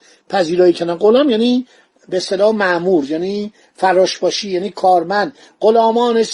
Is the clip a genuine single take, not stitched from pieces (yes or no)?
yes